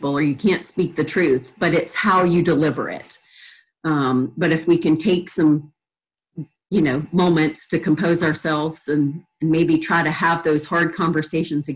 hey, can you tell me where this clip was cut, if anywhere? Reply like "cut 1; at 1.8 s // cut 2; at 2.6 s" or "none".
cut 1; at 3.7 s

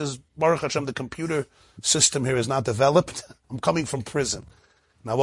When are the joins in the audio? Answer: cut 1; at 3.4 s

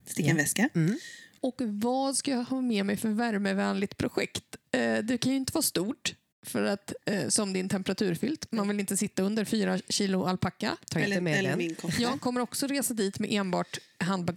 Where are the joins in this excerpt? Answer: cut 1; at 1.4 s

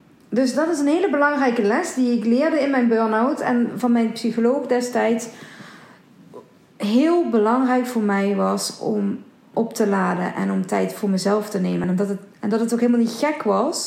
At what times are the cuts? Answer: none

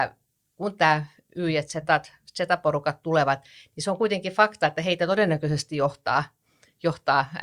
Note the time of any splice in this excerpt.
none

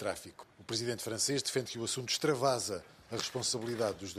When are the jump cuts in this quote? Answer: none

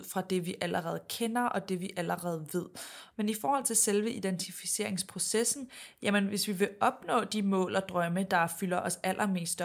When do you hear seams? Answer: cut 1; at 3.1 s

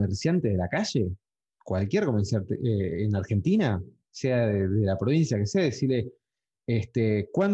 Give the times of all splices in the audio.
none

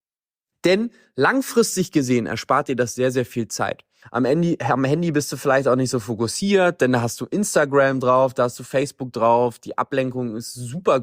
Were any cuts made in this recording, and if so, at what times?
cut 1; at 4.0 s

